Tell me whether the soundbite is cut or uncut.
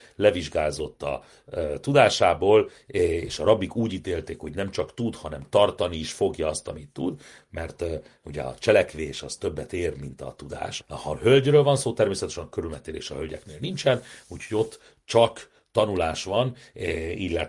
cut